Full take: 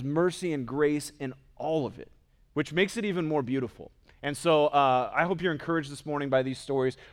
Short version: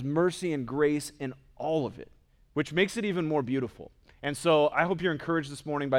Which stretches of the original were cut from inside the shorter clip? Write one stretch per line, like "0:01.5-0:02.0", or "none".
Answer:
0:04.7-0:05.1